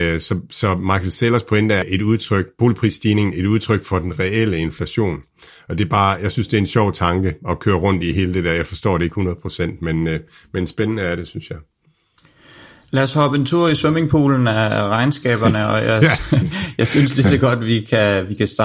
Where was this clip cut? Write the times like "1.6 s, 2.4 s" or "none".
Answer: 1.8 s, 16.2 s